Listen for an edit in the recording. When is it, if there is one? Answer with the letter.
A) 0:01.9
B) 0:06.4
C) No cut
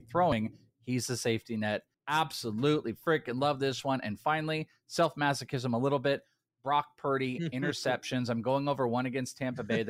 A